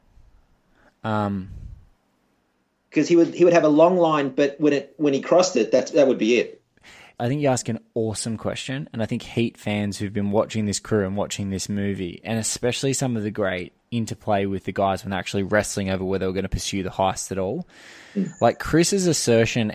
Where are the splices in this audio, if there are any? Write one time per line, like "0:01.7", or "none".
0:07.2